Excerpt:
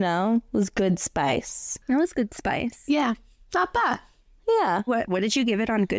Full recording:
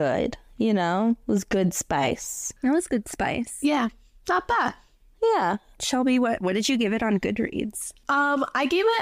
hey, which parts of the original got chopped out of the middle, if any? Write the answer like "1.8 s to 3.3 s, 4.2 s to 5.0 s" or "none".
5.6 s to 6.2 s